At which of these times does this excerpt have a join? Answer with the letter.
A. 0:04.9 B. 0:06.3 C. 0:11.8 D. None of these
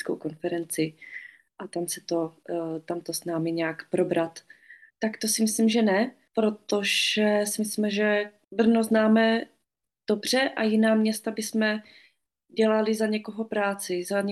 A